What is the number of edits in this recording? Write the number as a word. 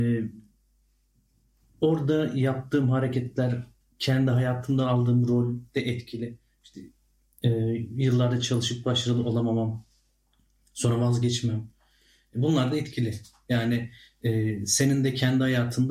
zero